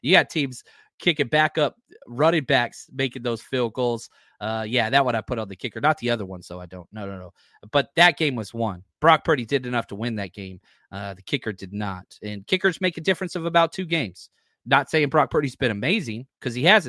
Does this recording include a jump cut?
no; 0 cuts

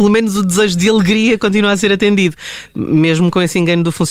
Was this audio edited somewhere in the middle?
no; 0 cuts

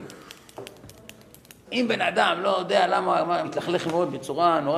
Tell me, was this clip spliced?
yes; 2 cuts; at 1.6 s, 3.4 s

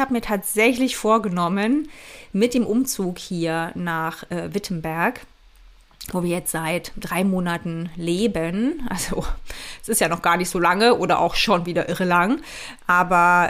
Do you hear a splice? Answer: no; 0 cuts

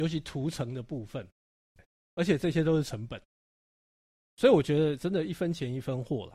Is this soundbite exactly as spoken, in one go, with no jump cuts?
no; 2 cuts; at 1.8 s, 4.3 s

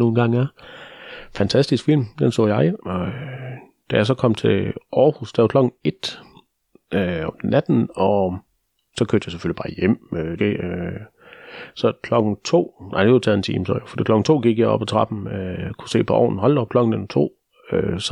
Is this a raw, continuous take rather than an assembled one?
no; 2 cuts; at 2.8 s, 10.4 s

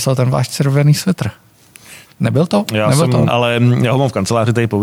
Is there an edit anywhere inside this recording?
yes; 2 cuts; at 2.1 s, 3.3 s

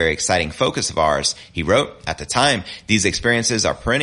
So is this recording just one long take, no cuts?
yes; 0 cuts

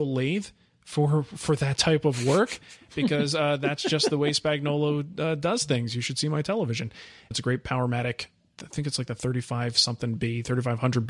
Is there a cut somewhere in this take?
yes; 1 cut; at 7.3 s

